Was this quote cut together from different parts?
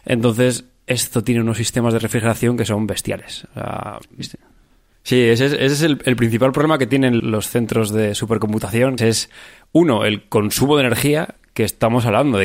yes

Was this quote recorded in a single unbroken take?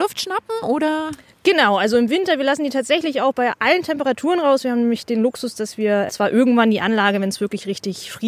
yes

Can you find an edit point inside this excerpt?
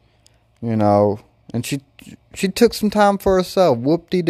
no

